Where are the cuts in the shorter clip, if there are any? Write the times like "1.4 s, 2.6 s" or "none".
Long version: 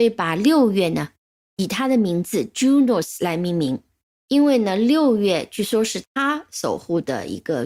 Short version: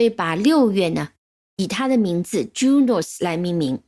none